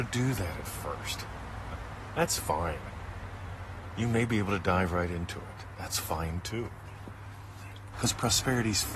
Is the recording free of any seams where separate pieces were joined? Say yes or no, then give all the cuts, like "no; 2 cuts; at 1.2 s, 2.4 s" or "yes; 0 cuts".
no; 1 cut; at 7.9 s